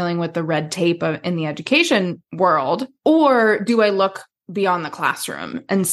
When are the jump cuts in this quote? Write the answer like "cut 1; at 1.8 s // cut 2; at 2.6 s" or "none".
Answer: none